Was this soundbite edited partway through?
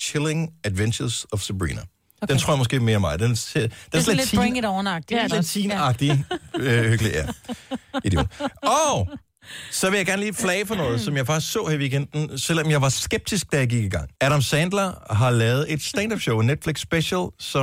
yes; 2 cuts; at 5.3 s, 14.2 s

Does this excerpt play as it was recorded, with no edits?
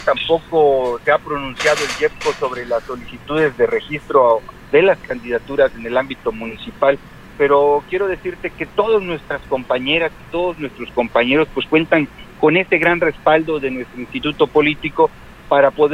no; 1 cut; at 7.3 s

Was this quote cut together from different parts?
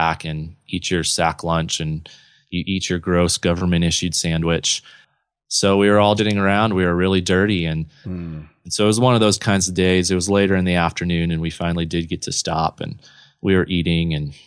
yes; 2 cuts; at 6.2 s, 8.0 s

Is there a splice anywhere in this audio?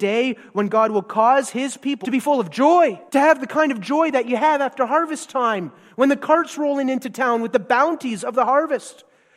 yes; 2 cuts; at 2.0 s, 3.1 s

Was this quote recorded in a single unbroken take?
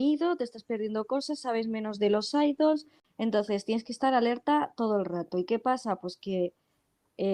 yes; 0 cuts

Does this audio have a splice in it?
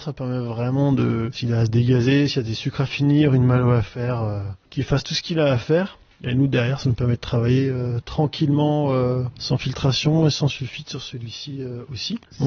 no; 0 cuts

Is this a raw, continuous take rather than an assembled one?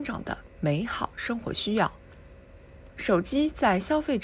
no; 1 cut; at 2.9 s

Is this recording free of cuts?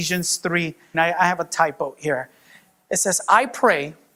no; 1 cut; at 0.9 s

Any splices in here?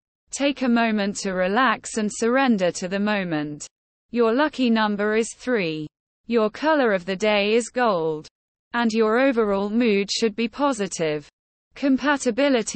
yes; 1 cut; at 6.2 s

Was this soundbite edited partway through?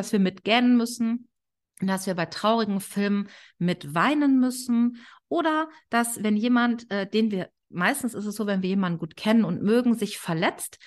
no; 0 cuts

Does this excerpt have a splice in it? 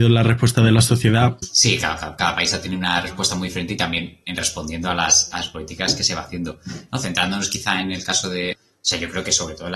yes; 2 cuts; at 1.4 s, 8.5 s

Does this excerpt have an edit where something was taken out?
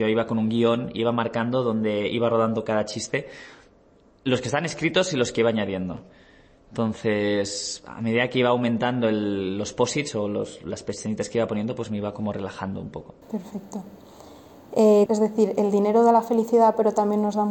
yes; 2 cuts; at 13.2 s, 15.1 s

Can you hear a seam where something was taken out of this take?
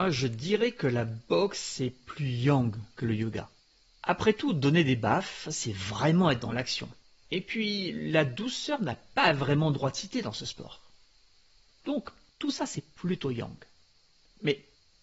no; 0 cuts

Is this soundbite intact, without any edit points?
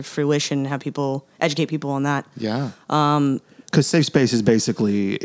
yes; 0 cuts

